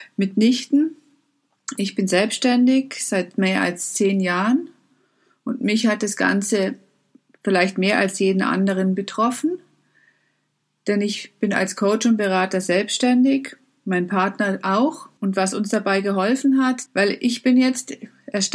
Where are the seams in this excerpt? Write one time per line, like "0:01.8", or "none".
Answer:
0:15.2
0:16.9